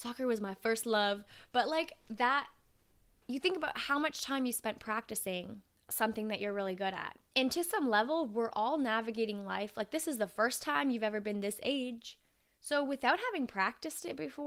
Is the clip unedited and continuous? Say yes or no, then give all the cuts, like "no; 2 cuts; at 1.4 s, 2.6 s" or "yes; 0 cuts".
no; 1 cut; at 12.5 s